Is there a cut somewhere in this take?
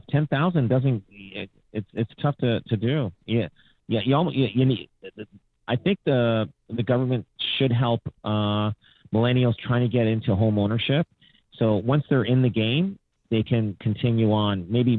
no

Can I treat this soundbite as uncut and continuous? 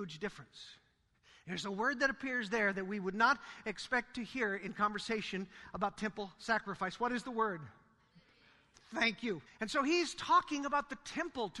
no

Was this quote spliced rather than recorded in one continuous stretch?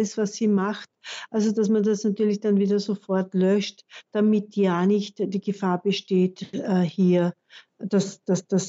no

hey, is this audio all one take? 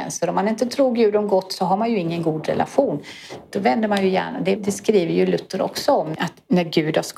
no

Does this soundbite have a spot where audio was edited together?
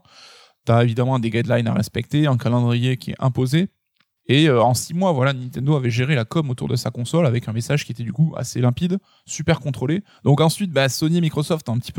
yes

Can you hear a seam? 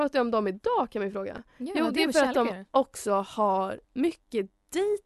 yes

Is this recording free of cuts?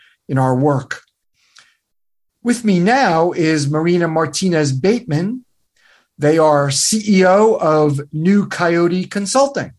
yes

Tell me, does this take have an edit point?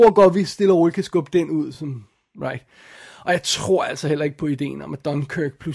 no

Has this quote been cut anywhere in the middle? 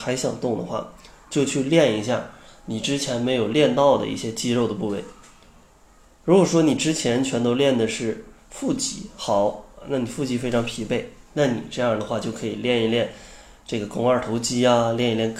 no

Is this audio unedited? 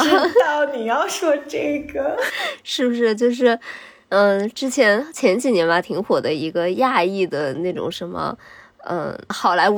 yes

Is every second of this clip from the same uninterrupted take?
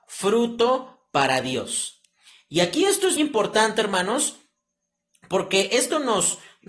no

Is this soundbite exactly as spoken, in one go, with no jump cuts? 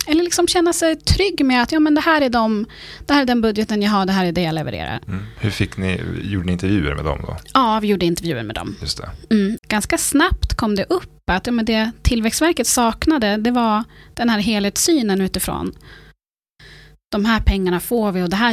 no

